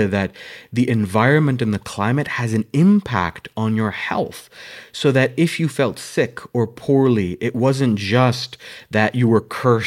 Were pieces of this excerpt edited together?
no; 0 cuts

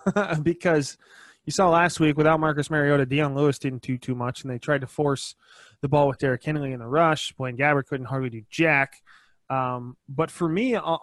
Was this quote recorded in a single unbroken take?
yes; 0 cuts

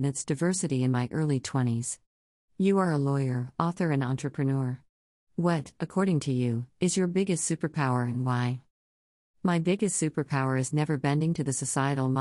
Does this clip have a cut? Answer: yes; 1 cut; at 2.4 s

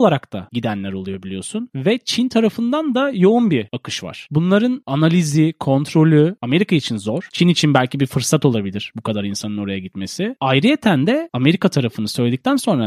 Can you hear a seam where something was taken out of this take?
no; 0 cuts

